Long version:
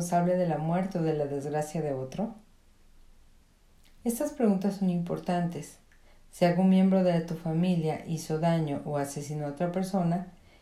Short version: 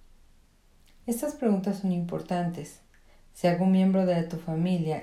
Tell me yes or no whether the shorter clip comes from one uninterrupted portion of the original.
yes